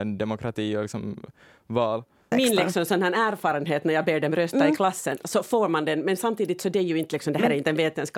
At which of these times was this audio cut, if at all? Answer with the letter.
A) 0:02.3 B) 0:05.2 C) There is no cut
A